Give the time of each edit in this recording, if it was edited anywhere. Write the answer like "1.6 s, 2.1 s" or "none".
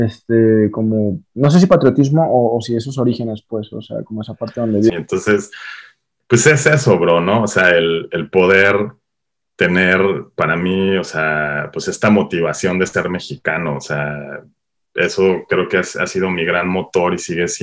4.9 s

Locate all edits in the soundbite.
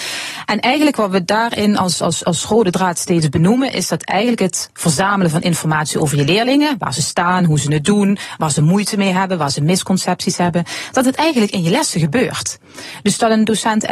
none

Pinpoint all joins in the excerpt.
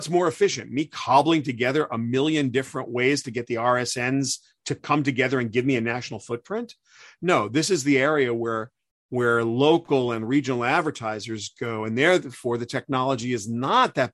none

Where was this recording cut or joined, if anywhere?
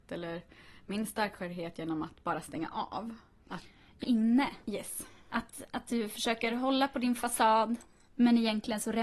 4.0 s

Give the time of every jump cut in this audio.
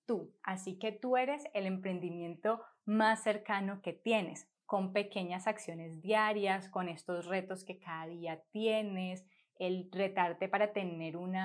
4.6 s

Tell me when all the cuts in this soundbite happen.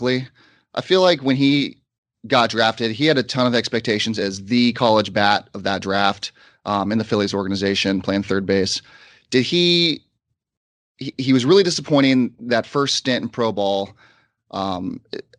none

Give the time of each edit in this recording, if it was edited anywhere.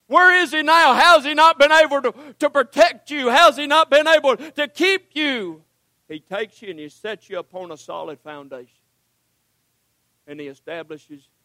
5.9 s

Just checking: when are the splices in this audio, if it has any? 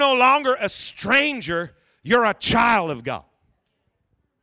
none

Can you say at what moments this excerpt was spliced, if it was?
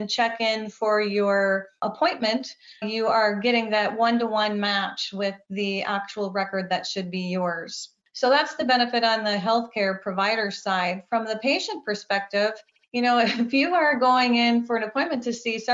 2.8 s

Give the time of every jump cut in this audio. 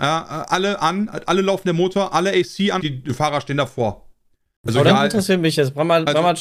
2.8 s, 4.6 s

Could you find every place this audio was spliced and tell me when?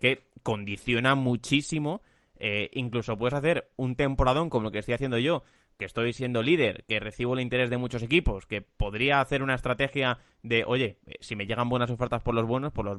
none

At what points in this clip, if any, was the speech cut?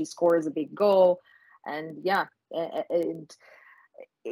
none

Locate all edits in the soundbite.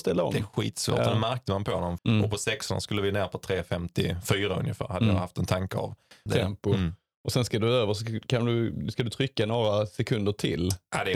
2.0 s, 6.3 s

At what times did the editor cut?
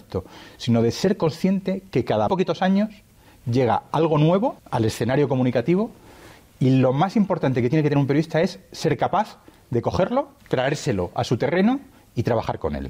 2.3 s, 4.6 s, 10.4 s

